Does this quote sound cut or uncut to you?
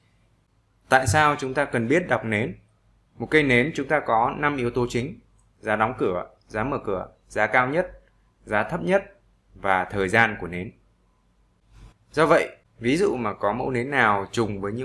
cut